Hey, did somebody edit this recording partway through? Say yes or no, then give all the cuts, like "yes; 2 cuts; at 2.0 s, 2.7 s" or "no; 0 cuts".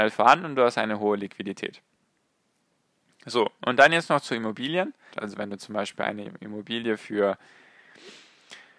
yes; 1 cut; at 5.1 s